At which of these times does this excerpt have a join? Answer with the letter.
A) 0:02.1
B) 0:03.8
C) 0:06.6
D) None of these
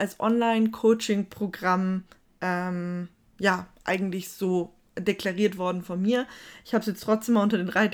D